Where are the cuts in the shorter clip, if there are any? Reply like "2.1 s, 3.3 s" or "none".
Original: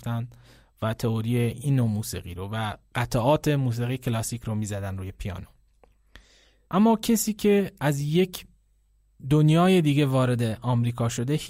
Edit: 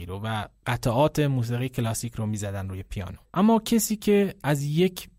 3.3 s